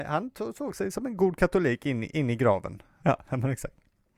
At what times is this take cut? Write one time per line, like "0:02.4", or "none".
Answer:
0:03.0